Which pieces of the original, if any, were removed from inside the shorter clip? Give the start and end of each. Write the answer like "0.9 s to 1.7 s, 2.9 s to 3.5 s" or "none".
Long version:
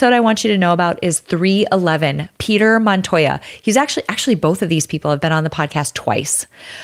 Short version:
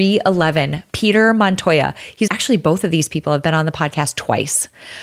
3.7 s to 4.1 s